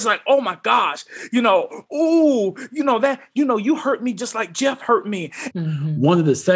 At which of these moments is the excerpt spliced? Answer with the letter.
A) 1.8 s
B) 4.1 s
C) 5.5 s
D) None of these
C